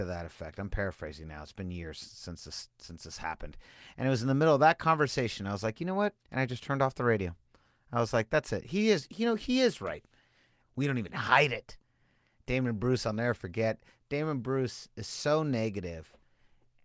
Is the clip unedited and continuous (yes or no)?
no